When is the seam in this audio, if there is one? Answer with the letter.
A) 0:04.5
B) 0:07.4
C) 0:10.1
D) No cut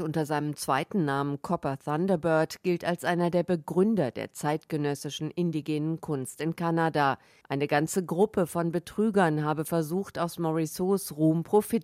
B